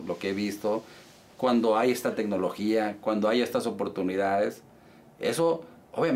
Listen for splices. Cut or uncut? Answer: uncut